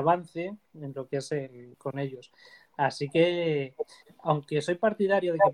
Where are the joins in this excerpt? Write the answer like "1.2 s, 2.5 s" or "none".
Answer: 1.7 s